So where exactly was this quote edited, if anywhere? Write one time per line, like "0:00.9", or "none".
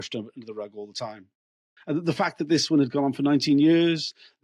0:01.8